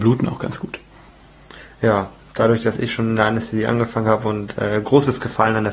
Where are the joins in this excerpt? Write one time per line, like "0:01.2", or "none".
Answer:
none